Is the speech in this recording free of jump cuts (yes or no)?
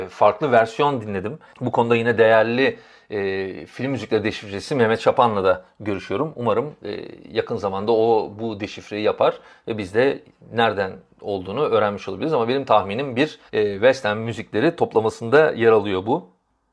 no